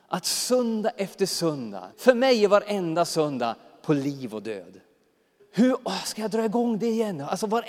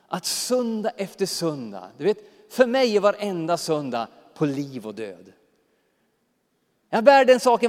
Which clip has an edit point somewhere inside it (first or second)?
first